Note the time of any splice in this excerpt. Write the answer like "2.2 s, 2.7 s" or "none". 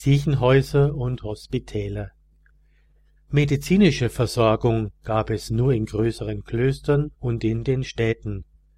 3.2 s, 7.1 s